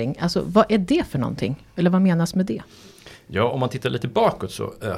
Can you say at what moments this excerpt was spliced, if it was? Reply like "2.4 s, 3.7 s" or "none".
none

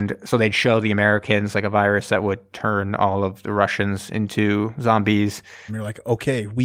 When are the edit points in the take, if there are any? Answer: 5.7 s

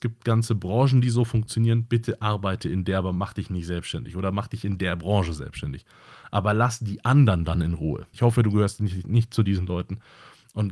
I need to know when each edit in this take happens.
8.1 s

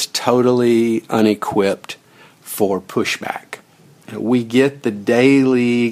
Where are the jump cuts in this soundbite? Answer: none

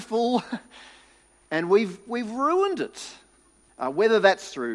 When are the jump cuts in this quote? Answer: 3.7 s

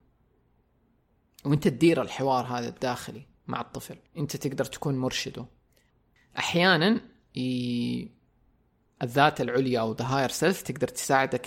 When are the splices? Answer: 4.1 s, 8.8 s

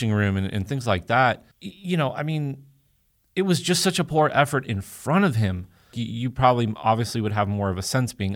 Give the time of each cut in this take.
1.5 s, 5.9 s

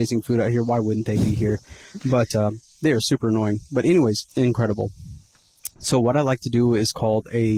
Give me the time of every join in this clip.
4.3 s

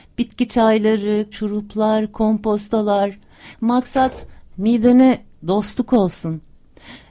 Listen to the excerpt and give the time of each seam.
1.3 s, 3.5 s

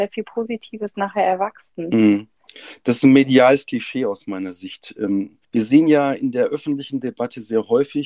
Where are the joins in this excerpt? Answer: 5.4 s

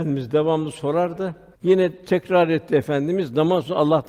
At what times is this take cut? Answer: 1.5 s

